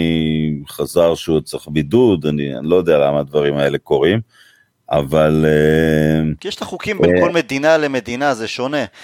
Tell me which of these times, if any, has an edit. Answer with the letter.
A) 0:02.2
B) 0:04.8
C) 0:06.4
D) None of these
D